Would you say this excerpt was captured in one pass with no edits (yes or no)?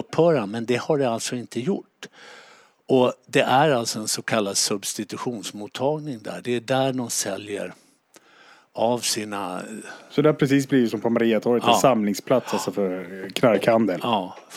yes